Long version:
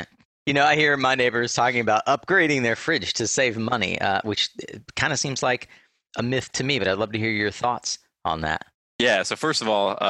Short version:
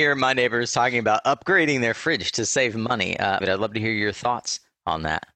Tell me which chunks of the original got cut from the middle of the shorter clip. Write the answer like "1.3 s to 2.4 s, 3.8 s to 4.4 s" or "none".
4.2 s to 6.8 s